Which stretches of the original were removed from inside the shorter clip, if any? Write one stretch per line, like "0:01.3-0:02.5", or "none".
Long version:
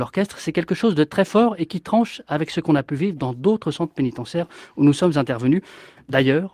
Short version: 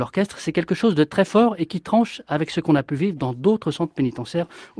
none